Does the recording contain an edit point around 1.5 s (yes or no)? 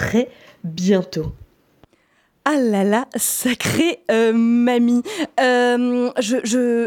no